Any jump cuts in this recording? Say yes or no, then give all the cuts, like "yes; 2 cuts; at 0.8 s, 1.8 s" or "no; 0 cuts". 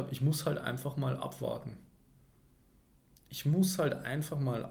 no; 0 cuts